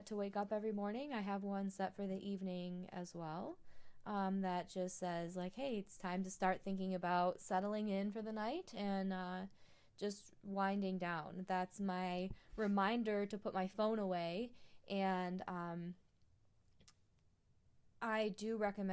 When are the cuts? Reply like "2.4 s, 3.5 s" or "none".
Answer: none